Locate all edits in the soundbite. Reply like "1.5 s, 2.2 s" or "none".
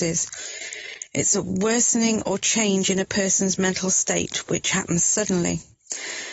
none